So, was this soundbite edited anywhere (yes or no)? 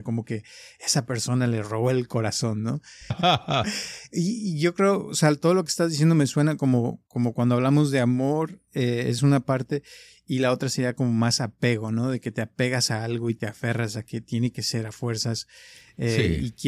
yes